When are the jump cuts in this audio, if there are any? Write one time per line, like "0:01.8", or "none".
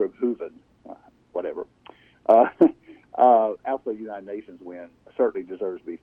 none